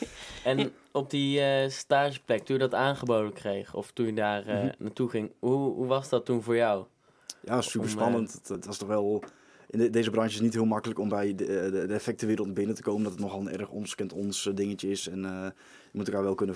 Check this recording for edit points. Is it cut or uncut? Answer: cut